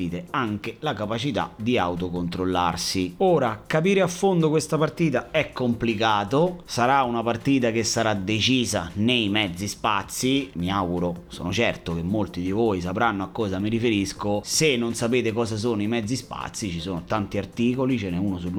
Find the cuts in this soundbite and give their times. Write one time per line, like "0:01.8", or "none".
none